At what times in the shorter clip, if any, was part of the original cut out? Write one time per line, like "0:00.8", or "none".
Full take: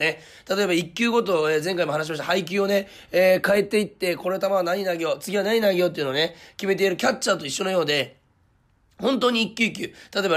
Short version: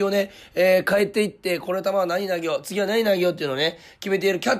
none